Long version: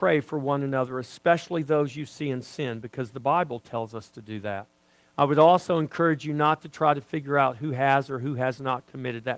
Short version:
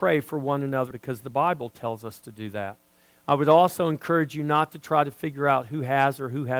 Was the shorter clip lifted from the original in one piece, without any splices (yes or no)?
no